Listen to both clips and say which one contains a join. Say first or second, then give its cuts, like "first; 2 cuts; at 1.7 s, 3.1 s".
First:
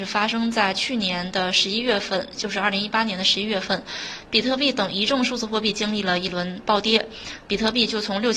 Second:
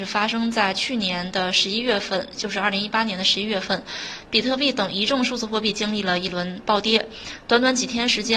first; 1 cut; at 7.5 s